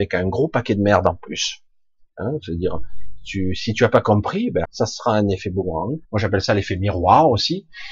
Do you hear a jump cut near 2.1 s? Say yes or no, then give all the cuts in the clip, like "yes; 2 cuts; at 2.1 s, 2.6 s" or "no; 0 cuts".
no; 2 cuts; at 4.6 s, 6.0 s